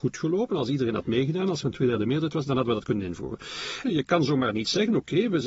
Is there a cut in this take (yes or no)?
yes